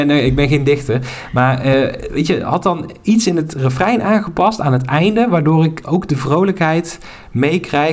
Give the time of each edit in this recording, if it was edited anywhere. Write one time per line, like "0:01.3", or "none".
none